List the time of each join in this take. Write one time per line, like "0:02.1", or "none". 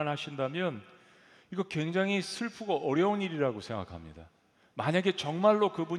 none